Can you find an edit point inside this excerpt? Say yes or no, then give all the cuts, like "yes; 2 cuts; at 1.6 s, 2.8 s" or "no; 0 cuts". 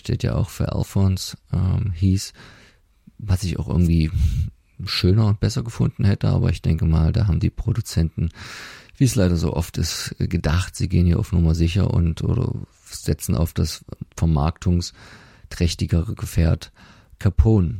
no; 0 cuts